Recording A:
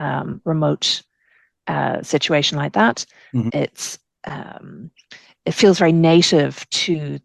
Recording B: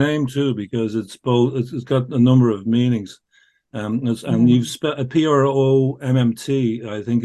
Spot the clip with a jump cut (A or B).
A